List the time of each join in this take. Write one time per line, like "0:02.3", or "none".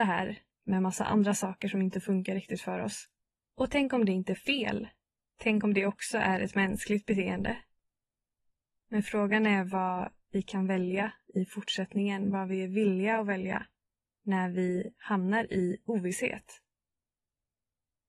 0:03.5